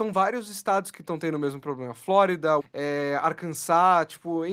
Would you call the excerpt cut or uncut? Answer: cut